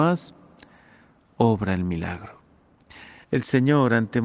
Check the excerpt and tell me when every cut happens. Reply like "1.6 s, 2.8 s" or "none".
3.2 s